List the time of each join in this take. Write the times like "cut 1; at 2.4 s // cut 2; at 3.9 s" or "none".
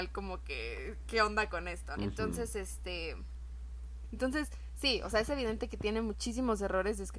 cut 1; at 2.0 s // cut 2; at 4.1 s